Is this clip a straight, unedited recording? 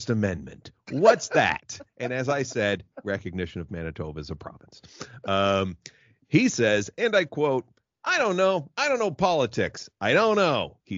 yes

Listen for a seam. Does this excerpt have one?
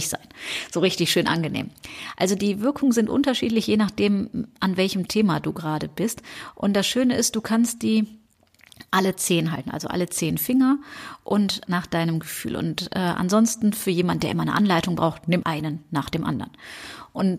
yes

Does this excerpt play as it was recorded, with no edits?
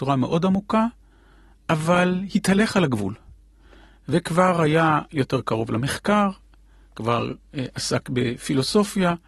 yes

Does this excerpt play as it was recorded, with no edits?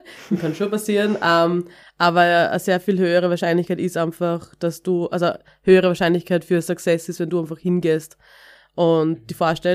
yes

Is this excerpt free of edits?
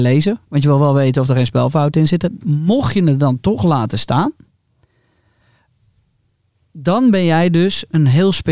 no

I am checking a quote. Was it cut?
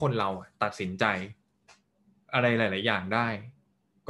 no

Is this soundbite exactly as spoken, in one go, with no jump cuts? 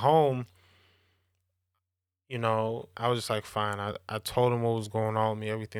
no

